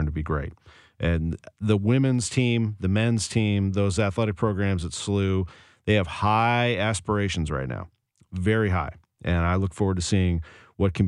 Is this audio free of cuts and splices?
yes; 0 cuts

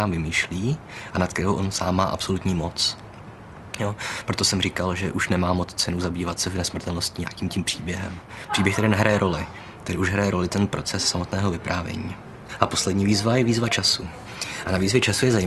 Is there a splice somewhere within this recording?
no; 0 cuts

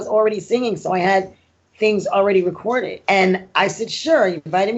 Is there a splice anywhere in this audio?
yes; 1 cut; at 3.0 s

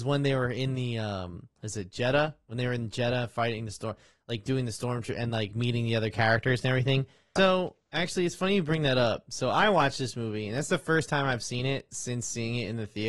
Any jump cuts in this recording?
yes; 2 cuts; at 1.6 s, 7.4 s

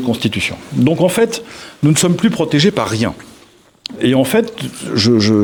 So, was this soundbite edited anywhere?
yes; 1 cut; at 4.0 s

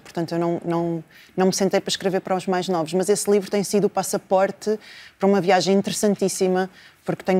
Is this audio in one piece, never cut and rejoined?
yes; 0 cuts

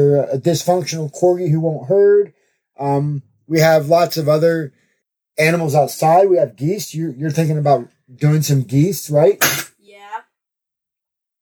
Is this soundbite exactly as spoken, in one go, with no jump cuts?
yes; 0 cuts

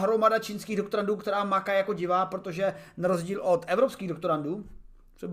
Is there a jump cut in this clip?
no; 0 cuts

